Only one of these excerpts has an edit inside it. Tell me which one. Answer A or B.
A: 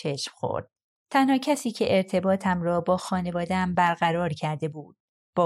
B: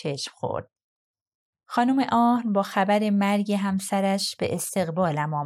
A